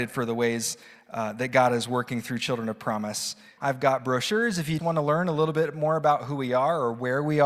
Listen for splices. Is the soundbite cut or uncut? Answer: cut